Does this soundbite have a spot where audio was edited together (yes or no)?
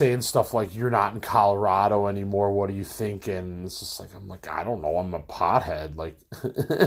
no